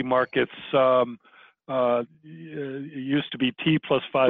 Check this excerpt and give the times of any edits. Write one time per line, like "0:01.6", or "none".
none